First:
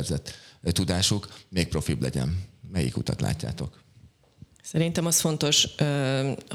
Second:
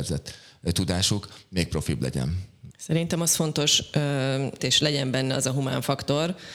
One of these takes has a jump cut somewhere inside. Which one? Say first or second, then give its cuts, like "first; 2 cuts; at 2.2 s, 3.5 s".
second; 2 cuts; at 2.7 s, 4.6 s